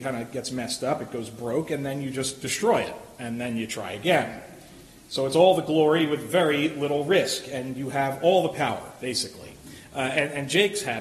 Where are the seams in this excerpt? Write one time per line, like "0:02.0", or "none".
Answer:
none